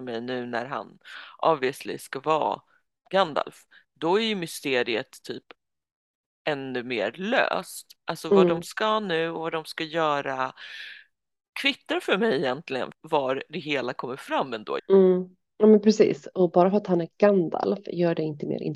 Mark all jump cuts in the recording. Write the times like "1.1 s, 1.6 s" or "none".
12.9 s, 14.8 s

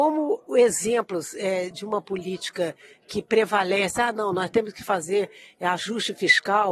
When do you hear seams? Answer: none

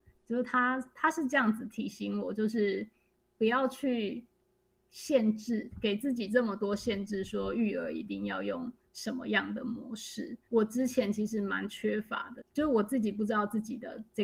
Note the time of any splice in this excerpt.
10.5 s, 12.4 s

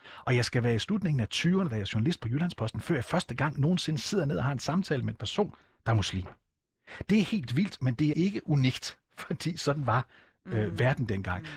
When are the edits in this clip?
8.1 s

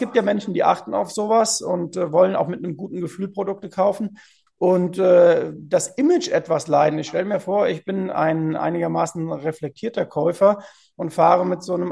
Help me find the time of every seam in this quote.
4.5 s

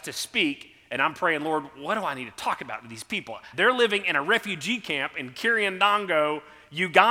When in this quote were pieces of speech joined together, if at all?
3.5 s

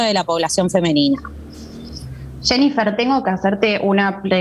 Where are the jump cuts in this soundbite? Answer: none

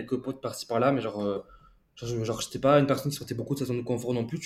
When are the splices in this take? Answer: none

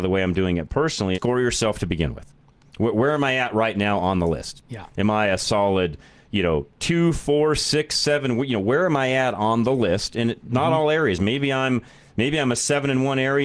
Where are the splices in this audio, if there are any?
1.1 s

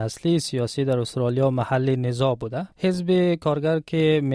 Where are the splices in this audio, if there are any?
2.7 s

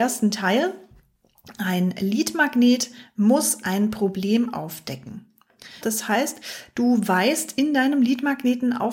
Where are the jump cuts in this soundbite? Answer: 5.8 s

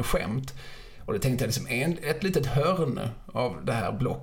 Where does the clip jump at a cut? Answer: none

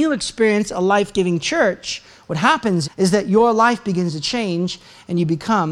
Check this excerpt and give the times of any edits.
2.8 s

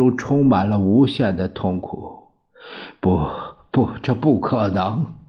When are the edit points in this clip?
none

